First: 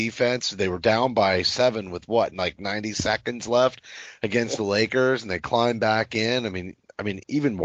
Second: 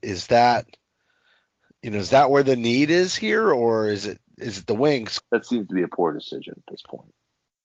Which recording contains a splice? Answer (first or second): second